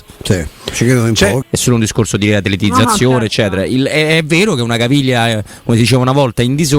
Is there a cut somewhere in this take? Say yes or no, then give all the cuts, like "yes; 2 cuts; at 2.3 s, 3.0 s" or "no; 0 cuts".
yes; 1 cut; at 1.4 s